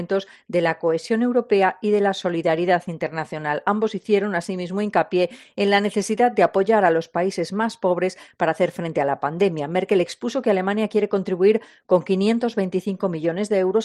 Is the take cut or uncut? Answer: uncut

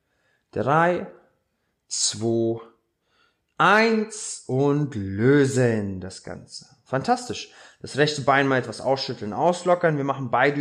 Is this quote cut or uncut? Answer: uncut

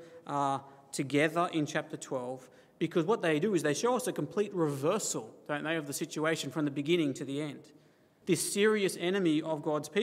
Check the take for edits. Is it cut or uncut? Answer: cut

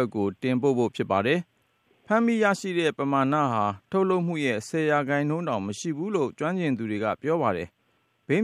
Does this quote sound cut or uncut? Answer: uncut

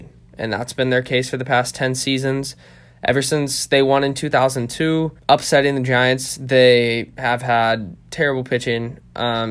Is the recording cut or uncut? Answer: cut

